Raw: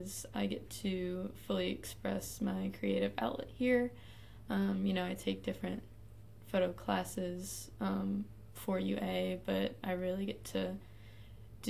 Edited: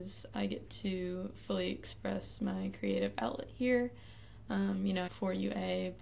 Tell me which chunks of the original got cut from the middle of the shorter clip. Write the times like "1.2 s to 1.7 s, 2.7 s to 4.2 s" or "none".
5.1 s to 8.5 s